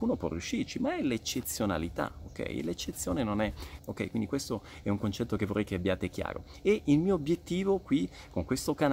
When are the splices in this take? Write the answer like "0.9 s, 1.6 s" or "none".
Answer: 3.8 s